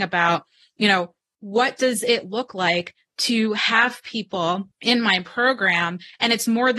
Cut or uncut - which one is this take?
cut